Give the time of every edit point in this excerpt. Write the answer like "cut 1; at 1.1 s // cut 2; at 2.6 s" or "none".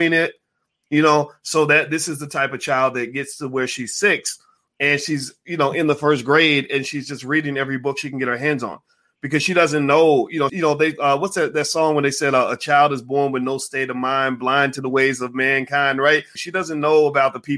cut 1; at 10.5 s // cut 2; at 16.4 s